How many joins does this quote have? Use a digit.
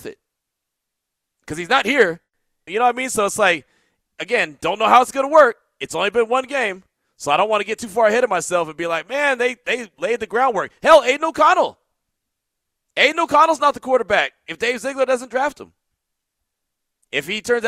1